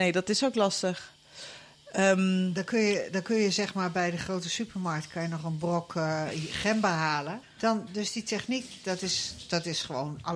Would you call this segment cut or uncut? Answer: cut